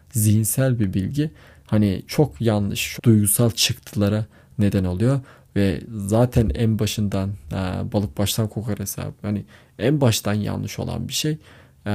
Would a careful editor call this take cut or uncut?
cut